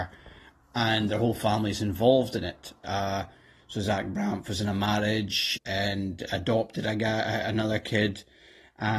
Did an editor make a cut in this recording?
yes; 2 cuts; at 2.8 s, 5.6 s

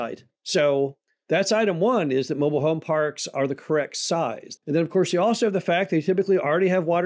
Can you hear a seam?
yes; 1 cut; at 4.6 s

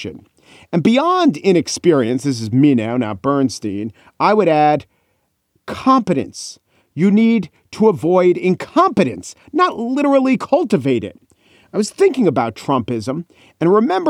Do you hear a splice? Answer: no; 0 cuts

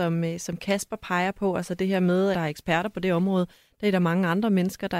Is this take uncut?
no; 1 cut; at 2.3 s

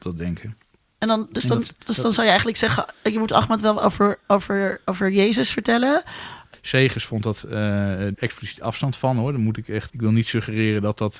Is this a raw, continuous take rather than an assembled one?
no; 3 cuts; at 6.5 s, 8.1 s, 9.9 s

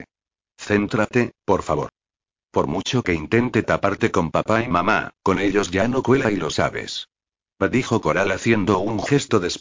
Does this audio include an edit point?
no; 0 cuts

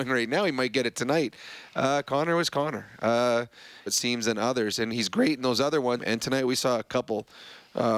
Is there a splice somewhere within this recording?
yes; 2 cuts; at 3.9 s, 6.0 s

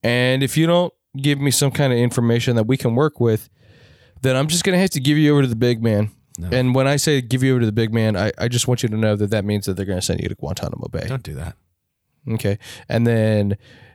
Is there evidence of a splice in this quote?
no; 0 cuts

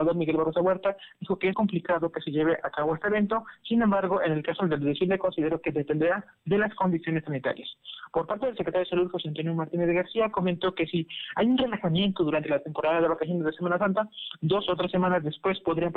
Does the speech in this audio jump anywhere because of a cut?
yes; 1 cut; at 1.5 s

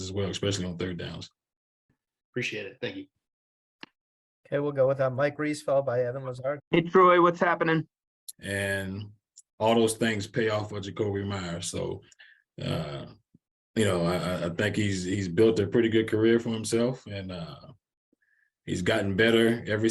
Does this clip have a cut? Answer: yes; 2 cuts; at 6.6 s, 8.3 s

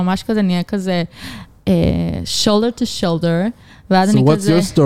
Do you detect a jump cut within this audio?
no; 0 cuts

